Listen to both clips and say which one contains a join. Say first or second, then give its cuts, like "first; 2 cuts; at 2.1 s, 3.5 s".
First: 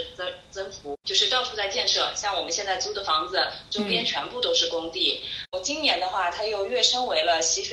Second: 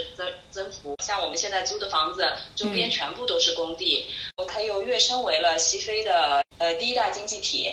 second; 2 cuts; at 1.0 s, 4.5 s